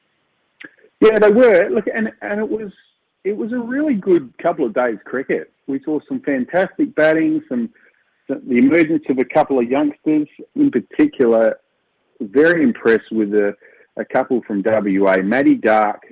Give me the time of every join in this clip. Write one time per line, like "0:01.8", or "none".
0:10.5